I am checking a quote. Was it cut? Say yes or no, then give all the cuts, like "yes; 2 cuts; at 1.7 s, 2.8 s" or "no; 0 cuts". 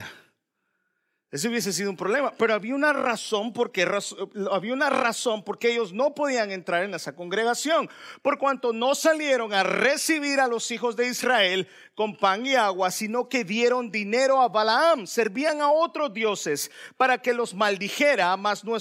no; 0 cuts